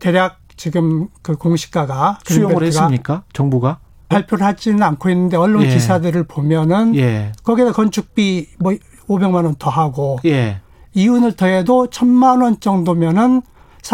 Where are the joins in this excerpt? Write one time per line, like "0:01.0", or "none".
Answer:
0:04.1
0:07.4

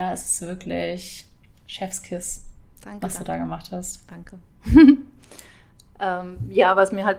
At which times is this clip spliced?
none

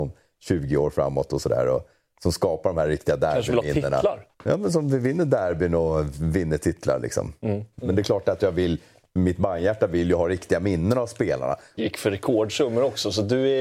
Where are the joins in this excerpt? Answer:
0:04.3
0:07.7
0:11.8

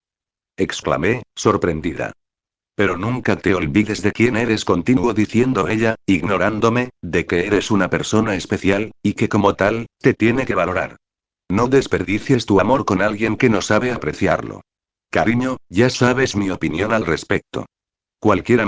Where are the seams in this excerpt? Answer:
0:15.0

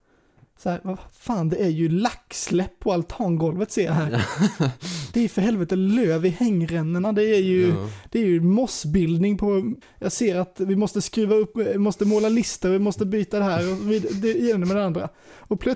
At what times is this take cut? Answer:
0:09.8

